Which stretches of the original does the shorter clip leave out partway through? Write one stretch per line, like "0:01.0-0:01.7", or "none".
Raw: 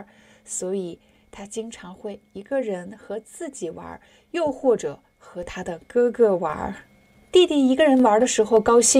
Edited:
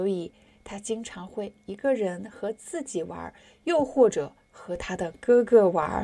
none